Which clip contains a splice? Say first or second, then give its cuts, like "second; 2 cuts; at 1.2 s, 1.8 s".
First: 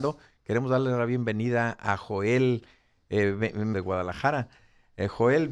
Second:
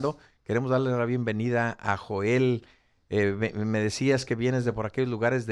first; 1 cut; at 3.7 s